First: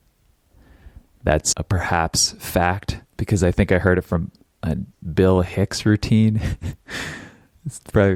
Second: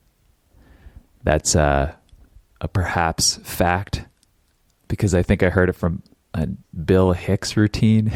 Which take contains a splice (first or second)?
first